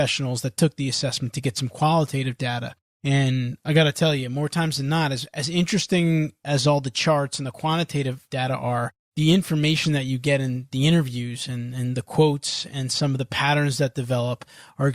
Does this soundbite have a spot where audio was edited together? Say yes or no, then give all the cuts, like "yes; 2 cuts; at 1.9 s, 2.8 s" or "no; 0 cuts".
no; 0 cuts